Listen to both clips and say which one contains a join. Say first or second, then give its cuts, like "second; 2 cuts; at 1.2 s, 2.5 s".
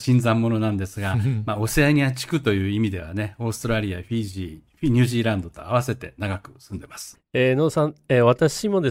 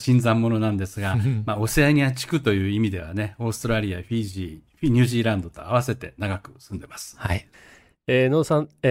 first; 1 cut; at 7.1 s